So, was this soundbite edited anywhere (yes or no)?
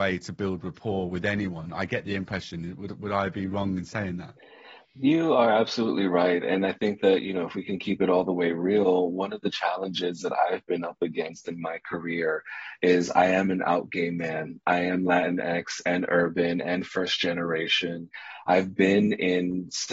no